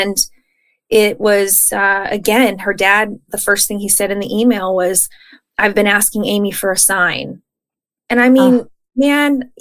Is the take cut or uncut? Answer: uncut